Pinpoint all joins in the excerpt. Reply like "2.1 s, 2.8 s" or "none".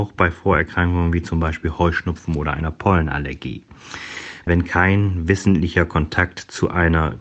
4.4 s